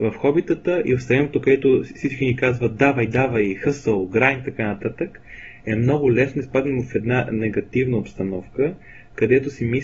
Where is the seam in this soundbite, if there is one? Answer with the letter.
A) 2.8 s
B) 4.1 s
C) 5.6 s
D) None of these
D